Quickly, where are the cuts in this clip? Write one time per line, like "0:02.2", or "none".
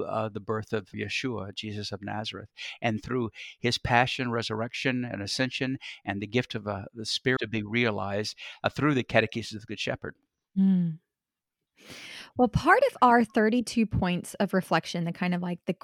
0:00.9
0:07.4